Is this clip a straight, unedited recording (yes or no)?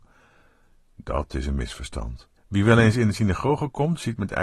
no